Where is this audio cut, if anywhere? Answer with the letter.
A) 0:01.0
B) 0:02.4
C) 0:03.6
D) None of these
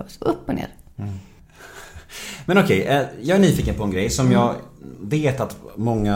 D